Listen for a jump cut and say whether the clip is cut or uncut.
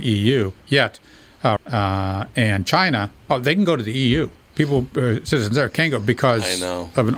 cut